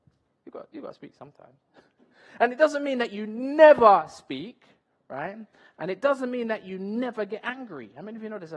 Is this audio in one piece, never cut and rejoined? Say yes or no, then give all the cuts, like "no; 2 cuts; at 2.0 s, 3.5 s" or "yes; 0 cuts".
yes; 0 cuts